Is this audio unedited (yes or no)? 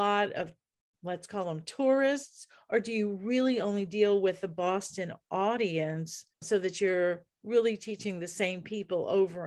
no